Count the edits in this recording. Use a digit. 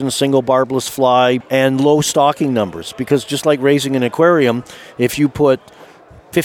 1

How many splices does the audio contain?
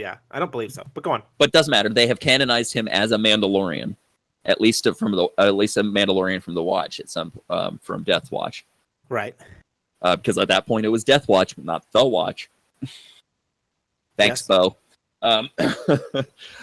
0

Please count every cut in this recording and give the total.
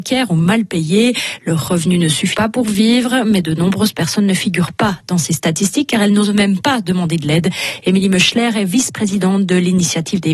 1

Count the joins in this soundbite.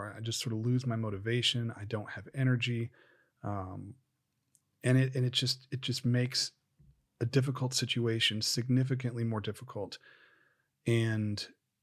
0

